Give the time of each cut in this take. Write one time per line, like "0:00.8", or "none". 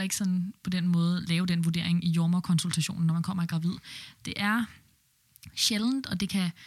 none

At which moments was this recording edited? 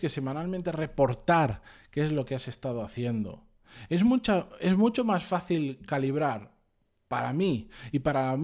none

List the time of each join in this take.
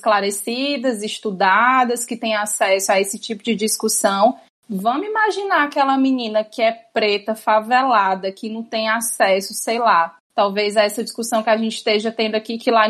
none

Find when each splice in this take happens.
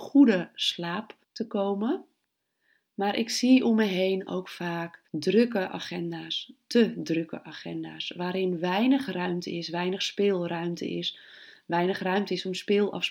0:01.2
0:05.1

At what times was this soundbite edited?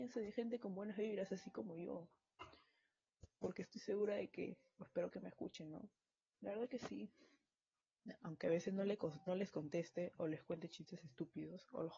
0:06.3
0:08.2
0:09.3

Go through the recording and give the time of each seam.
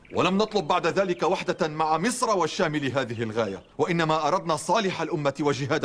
0:03.7

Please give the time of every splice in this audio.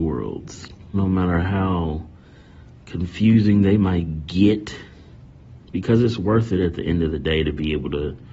0:00.9
0:05.6

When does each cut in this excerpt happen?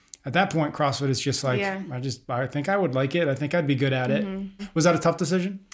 0:04.6

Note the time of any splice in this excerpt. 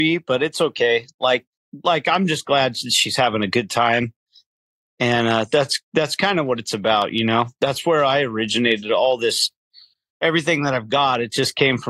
none

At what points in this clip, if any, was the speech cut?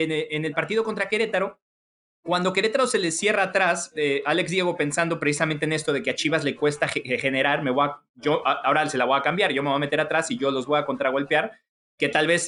none

